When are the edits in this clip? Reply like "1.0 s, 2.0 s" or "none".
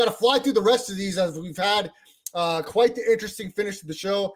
none